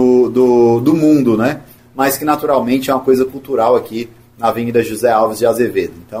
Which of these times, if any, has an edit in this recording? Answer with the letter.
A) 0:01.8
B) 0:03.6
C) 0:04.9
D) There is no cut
A